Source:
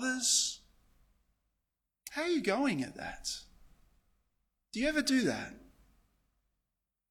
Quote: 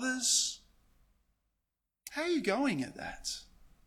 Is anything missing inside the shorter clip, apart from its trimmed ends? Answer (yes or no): no